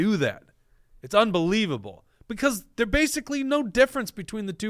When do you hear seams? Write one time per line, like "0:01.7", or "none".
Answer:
none

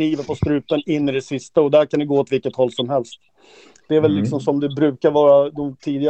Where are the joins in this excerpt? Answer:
none

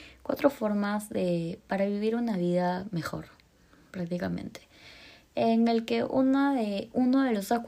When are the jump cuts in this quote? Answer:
none

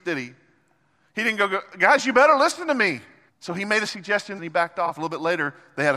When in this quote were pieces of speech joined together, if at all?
0:03.3
0:04.4

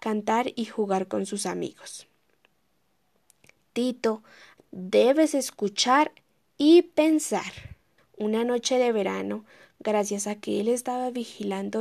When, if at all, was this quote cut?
0:04.6
0:08.0

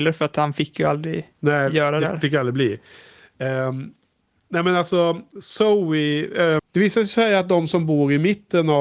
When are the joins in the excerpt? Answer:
0:06.6

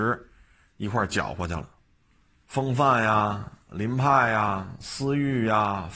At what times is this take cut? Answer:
0:02.5

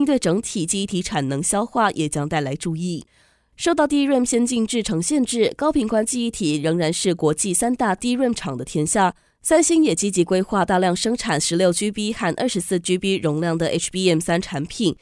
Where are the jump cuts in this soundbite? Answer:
0:09.3

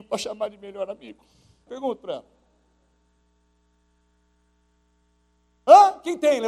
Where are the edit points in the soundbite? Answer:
0:01.7

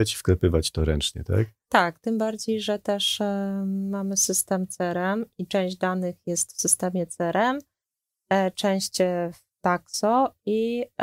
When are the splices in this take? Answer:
none

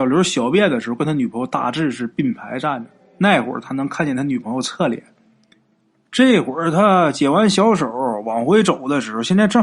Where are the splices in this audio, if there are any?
none

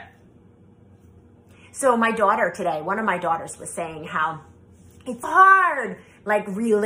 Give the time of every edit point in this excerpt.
0:05.2

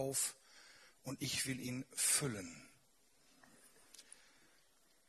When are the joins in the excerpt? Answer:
none

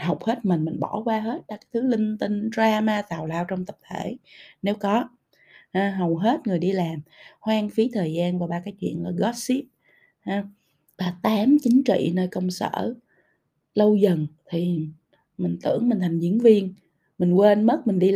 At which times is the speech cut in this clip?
0:10.9
0:14.4

